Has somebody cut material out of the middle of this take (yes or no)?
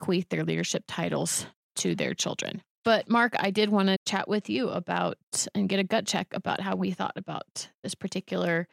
yes